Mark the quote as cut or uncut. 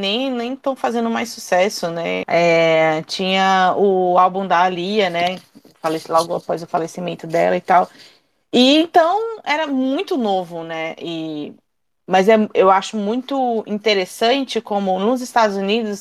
cut